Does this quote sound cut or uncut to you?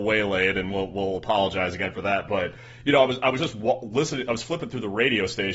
uncut